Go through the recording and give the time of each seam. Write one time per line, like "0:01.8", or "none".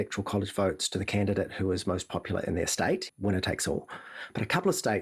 0:03.1